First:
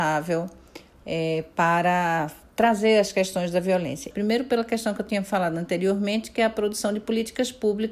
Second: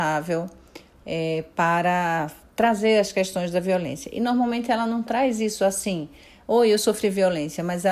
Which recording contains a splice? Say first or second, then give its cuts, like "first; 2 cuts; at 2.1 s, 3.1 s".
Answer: first; 1 cut; at 4.1 s